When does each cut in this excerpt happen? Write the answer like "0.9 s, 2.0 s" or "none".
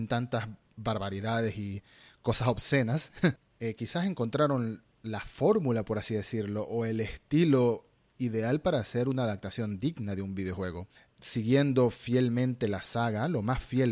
3.4 s